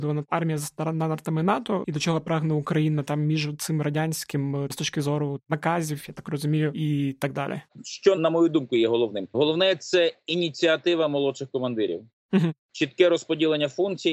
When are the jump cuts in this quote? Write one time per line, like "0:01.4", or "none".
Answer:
0:01.8